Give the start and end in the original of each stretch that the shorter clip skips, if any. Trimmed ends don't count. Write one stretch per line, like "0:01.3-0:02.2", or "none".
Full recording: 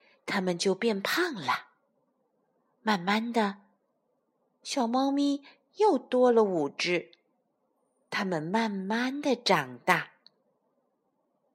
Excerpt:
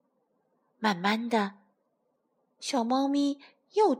none